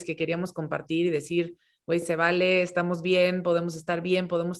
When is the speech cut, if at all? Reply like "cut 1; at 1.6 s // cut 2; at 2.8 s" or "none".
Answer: none